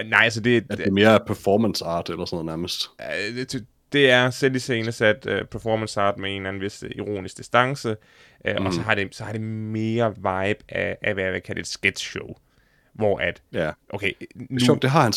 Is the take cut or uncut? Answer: uncut